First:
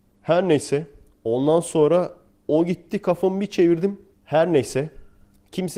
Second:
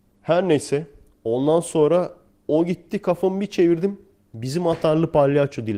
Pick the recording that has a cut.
first; 1 cut; at 4.1 s

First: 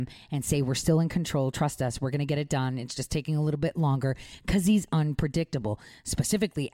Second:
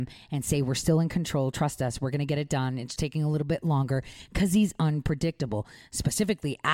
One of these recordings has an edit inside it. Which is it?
second; 1 cut; at 3.0 s

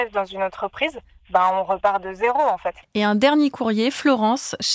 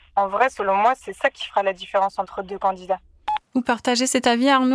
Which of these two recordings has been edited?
first; 1 cut; at 2.8 s

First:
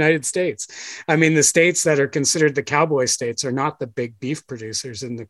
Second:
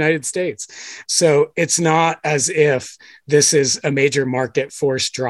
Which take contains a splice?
second; 1 cut; at 1.0 s

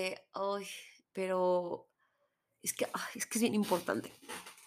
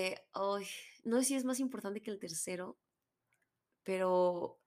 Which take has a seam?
first; 1 cut; at 1.0 s

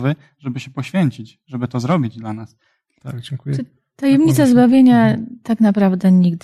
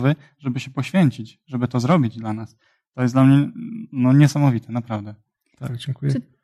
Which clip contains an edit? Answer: first; 1 cut; at 2.9 s

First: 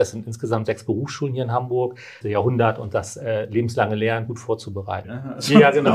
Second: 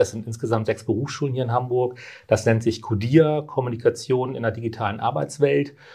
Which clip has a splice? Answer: first; 2 cuts; at 2.2 s, 5.0 s

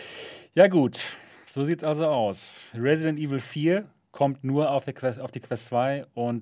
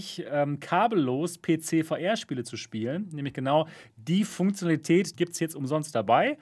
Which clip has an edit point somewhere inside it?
second; 1 cut; at 5.1 s

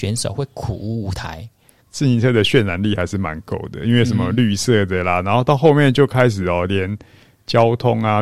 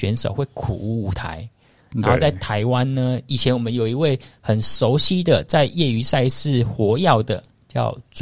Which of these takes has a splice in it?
first; 1 cut; at 1.8 s

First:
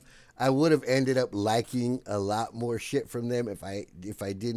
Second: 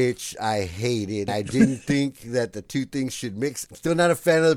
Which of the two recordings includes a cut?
second; 2 cuts; at 1.3 s, 3.7 s

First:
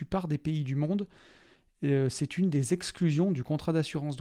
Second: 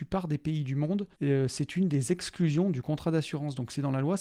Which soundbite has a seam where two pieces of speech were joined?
second; 1 cut; at 1.1 s

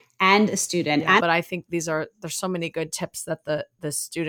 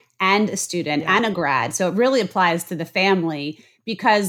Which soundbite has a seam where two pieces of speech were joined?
first; 1 cut; at 1.2 s

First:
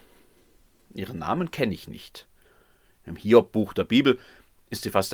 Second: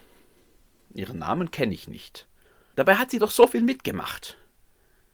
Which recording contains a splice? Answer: second; 1 cut; at 2.7 s

